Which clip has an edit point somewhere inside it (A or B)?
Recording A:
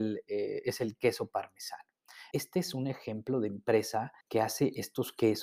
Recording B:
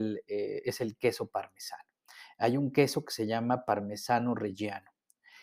A